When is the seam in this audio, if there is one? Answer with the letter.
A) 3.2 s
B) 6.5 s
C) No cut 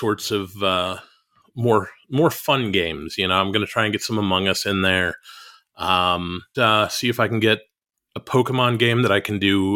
B